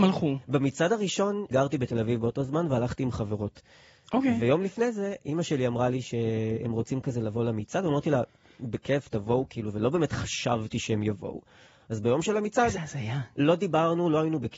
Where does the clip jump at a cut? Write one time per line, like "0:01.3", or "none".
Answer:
0:01.5